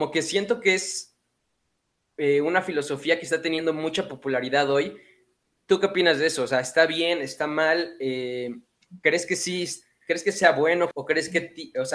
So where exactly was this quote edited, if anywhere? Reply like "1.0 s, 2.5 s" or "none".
10.9 s

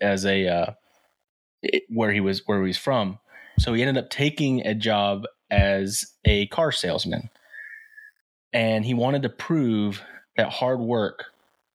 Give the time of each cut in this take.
3.6 s

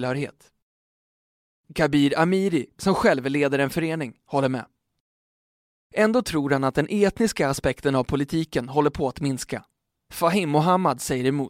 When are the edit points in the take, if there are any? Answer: none

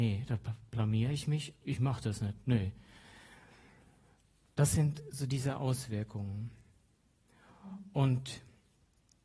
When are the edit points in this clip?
1.6 s

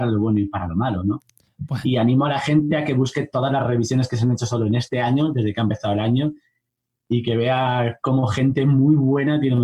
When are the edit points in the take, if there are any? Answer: none

